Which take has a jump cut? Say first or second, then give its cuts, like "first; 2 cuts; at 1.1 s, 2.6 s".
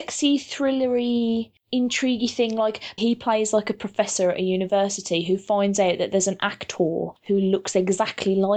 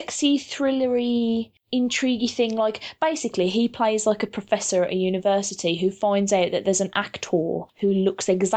first; 1 cut; at 3.0 s